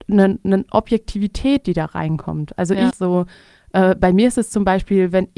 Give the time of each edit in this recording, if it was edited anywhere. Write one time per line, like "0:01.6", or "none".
0:02.9